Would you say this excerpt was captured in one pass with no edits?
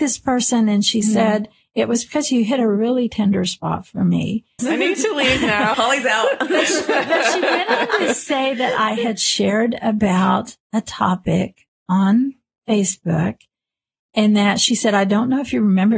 no; 2 cuts; at 4.6 s, 5.7 s

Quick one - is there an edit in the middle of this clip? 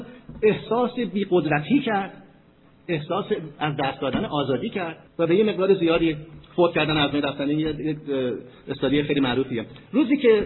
yes; 1 cut; at 5.1 s

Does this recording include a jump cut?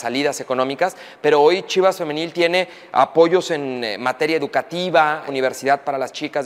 yes; 1 cut; at 5.3 s

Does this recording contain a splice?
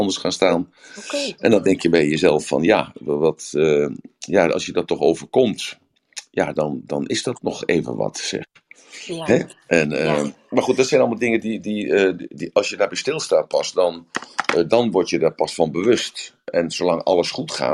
no; 0 cuts

